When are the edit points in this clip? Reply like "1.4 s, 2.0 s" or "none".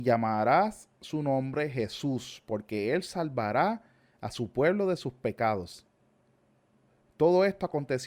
none